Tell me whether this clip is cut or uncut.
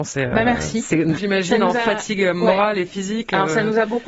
cut